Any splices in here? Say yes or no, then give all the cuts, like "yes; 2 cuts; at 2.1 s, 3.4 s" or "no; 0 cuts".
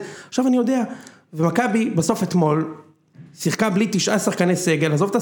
no; 0 cuts